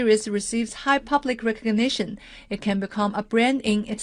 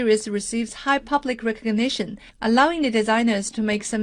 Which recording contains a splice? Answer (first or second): second